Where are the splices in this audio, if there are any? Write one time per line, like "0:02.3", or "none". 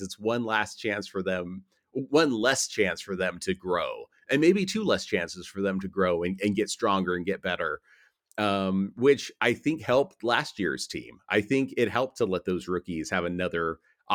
none